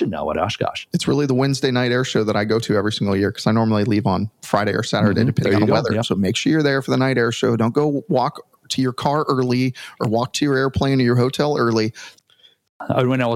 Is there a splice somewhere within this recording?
yes; 2 cuts; at 6.0 s, 12.2 s

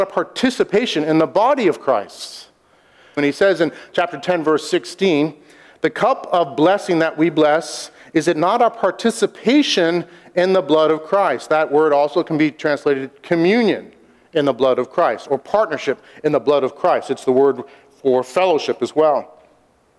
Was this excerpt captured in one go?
no; 1 cut; at 3.2 s

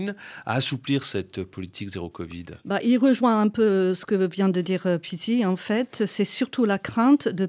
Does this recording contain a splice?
no; 0 cuts

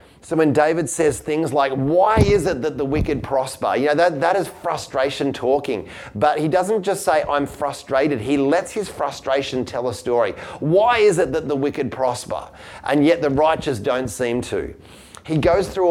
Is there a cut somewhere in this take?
no; 0 cuts

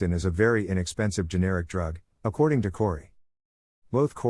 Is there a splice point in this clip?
yes; 1 cut; at 2.1 s

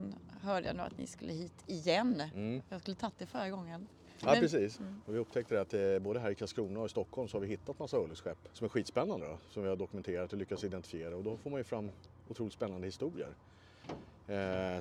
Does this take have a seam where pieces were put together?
yes; 2 cuts; at 4.7 s, 8.5 s

